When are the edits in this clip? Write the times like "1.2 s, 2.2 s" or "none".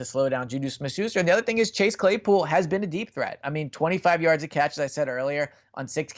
none